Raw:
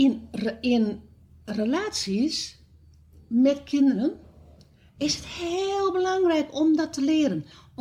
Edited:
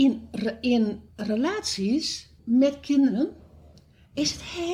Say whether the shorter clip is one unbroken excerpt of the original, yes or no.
no